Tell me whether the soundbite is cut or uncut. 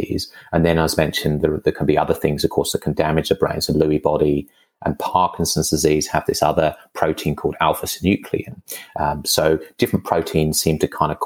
uncut